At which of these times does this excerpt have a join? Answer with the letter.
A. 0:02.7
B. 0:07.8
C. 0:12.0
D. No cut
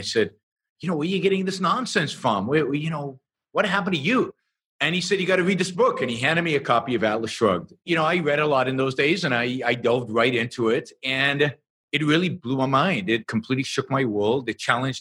B